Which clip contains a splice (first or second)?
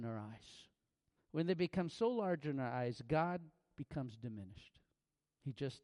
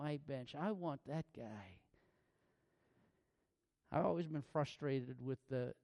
first